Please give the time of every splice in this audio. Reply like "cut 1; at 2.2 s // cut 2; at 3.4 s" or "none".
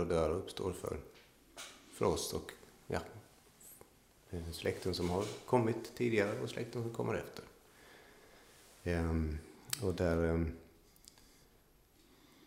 none